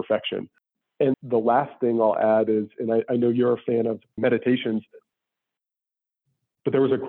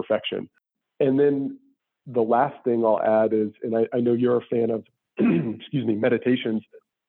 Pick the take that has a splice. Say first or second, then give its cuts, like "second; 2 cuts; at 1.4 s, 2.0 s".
first; 2 cuts; at 1.1 s, 4.2 s